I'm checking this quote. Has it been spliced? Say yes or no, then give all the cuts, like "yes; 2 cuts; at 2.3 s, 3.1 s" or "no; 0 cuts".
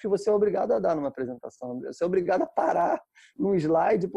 no; 0 cuts